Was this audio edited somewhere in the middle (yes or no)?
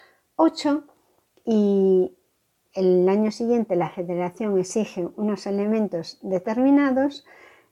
no